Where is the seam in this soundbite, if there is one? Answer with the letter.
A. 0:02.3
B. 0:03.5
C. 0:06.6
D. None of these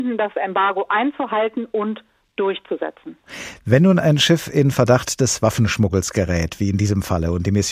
D